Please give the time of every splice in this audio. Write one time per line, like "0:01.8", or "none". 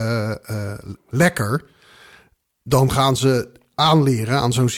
0:01.0